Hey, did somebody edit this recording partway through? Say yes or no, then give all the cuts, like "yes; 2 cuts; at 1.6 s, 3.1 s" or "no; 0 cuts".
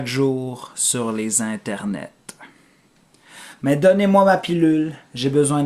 no; 0 cuts